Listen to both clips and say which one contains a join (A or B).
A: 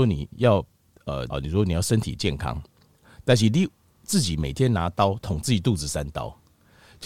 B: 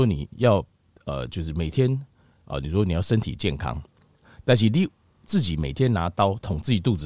A